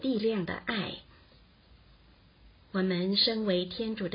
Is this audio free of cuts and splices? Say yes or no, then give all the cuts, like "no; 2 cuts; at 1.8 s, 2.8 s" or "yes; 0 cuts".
yes; 0 cuts